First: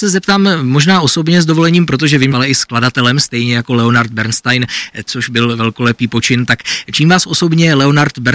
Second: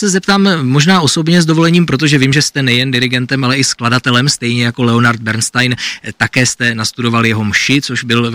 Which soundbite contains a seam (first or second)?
first